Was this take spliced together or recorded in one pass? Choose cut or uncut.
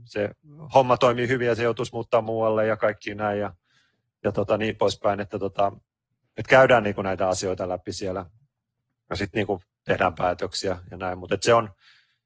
uncut